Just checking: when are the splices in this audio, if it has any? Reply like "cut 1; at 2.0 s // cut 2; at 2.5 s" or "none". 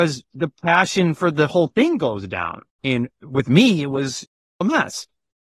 cut 1; at 2.8 s